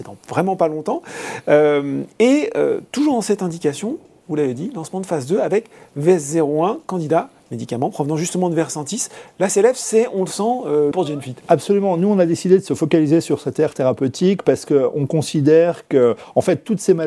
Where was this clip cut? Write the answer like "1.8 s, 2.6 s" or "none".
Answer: 7.4 s, 10.9 s